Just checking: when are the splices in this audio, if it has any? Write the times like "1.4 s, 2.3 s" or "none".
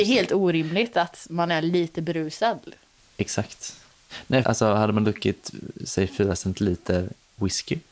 4.4 s